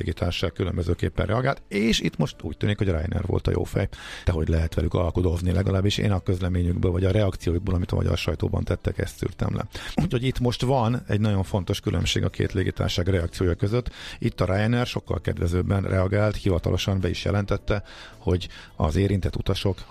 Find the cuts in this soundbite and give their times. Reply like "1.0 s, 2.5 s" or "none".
4.2 s, 10.0 s

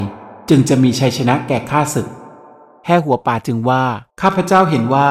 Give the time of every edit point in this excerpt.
4.1 s

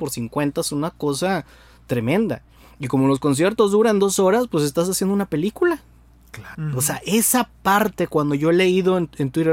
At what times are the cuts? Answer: 6.5 s

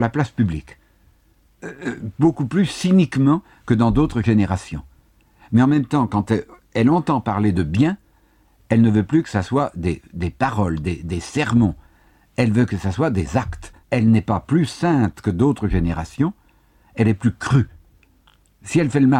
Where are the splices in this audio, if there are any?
13.8 s

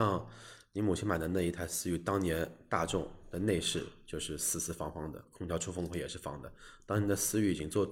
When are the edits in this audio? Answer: none

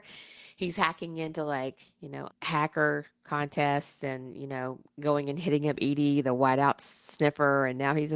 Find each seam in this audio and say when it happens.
2.3 s

